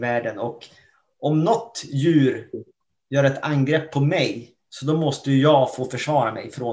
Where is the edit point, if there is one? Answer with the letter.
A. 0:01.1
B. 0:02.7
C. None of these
C